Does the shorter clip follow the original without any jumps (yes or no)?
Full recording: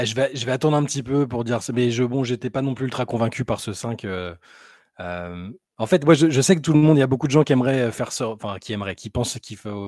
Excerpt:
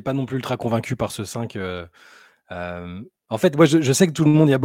yes